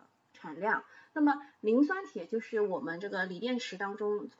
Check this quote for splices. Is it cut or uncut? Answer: uncut